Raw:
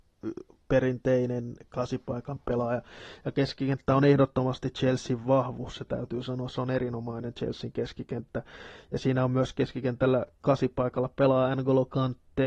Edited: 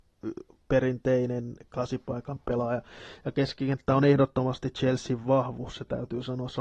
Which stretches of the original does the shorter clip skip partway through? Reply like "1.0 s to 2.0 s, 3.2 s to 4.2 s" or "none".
none